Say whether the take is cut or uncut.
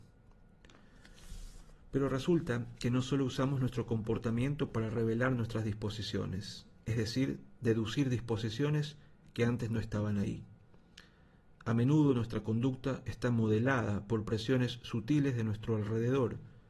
uncut